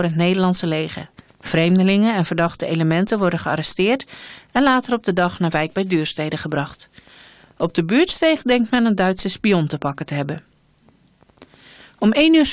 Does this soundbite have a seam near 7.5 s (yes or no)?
no